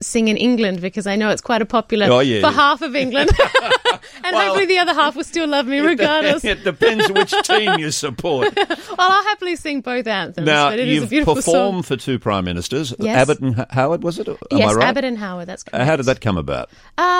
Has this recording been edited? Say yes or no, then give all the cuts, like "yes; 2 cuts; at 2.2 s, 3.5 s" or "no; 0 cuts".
no; 0 cuts